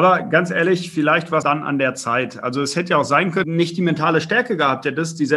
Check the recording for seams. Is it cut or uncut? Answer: cut